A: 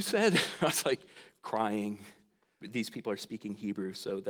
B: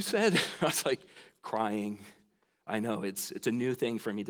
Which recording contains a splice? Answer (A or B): A